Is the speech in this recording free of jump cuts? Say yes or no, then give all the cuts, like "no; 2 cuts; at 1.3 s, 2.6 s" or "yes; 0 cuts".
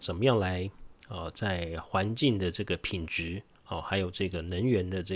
yes; 0 cuts